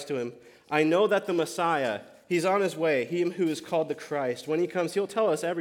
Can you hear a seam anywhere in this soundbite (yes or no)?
no